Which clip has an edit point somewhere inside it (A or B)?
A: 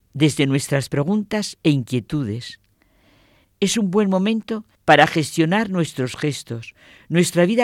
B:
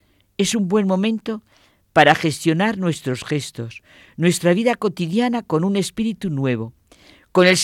A